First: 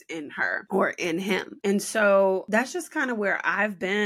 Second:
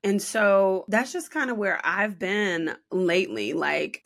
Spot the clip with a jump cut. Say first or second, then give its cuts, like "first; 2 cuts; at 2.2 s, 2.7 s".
first; 1 cut; at 1.6 s